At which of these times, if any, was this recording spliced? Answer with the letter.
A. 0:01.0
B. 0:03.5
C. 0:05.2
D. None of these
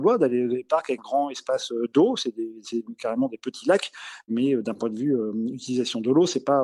A